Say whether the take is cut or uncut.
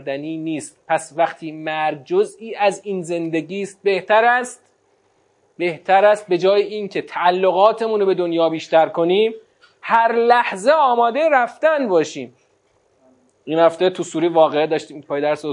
uncut